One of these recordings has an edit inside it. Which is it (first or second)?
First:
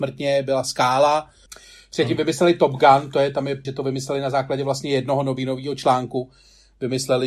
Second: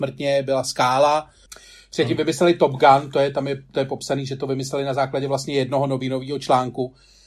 first